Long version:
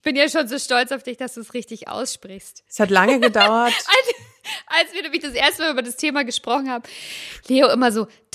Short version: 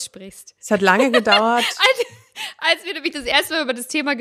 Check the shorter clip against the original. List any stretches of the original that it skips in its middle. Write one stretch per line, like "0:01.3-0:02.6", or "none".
none